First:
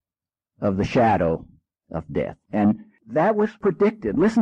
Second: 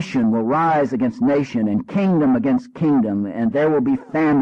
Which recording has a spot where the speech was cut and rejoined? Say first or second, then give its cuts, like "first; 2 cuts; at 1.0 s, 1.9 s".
first; 1 cut; at 2.4 s